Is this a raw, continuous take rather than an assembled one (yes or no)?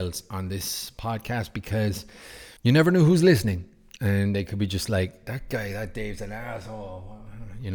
no